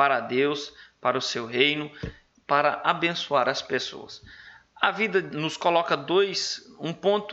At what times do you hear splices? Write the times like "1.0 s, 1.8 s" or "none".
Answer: 5.3 s